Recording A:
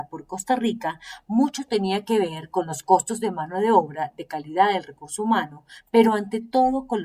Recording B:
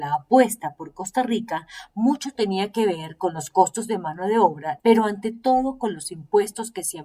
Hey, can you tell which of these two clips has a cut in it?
B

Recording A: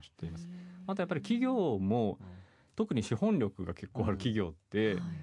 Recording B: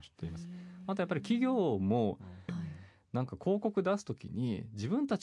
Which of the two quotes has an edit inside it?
B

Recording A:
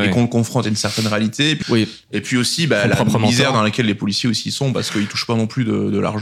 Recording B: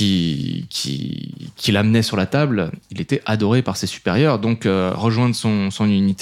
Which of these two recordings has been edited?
A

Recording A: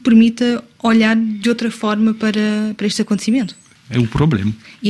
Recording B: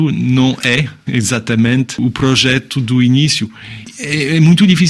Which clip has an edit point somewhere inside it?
A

